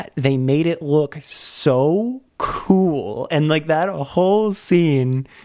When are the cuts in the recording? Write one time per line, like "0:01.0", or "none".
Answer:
none